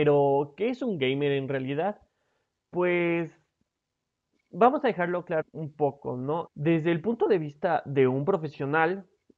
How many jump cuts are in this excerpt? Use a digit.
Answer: 2